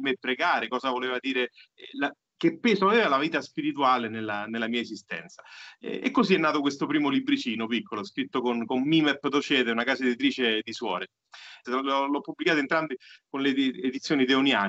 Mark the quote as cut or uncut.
cut